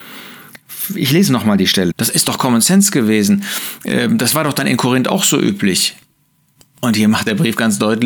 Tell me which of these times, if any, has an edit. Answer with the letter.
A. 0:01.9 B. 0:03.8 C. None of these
A